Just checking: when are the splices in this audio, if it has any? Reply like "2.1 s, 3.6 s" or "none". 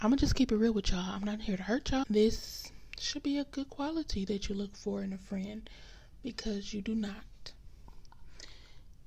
2.0 s